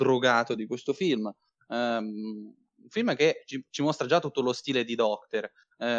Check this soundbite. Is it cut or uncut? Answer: uncut